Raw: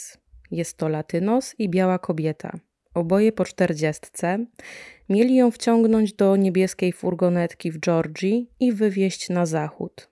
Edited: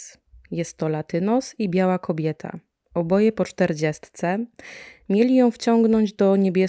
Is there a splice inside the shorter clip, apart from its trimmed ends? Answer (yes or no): no